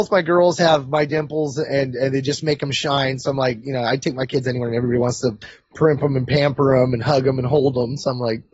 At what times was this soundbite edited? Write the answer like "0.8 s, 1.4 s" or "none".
none